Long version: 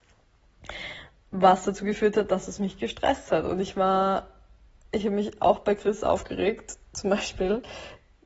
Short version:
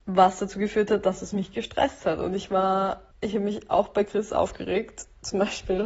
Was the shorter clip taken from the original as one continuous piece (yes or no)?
no